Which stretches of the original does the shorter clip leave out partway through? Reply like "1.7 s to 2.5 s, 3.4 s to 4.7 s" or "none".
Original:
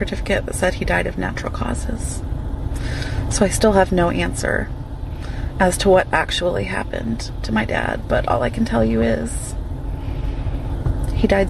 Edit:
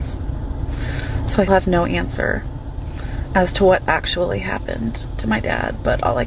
3.5 s to 3.7 s